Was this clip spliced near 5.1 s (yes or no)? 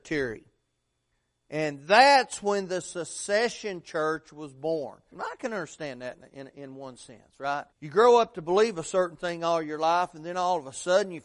yes